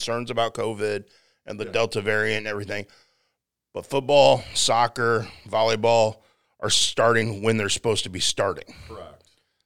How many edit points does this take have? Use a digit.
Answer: 0